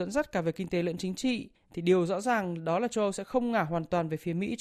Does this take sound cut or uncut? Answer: cut